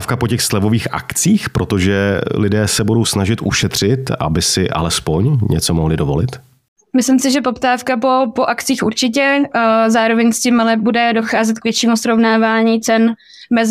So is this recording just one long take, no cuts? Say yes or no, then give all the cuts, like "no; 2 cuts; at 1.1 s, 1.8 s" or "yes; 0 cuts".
yes; 0 cuts